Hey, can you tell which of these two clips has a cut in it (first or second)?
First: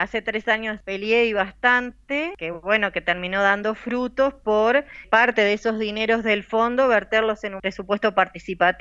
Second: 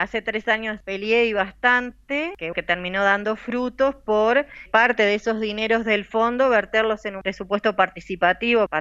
second